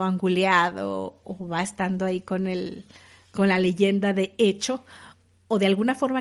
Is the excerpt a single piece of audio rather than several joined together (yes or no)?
no